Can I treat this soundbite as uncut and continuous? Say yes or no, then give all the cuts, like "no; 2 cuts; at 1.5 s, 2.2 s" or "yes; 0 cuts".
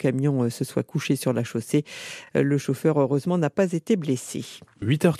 yes; 0 cuts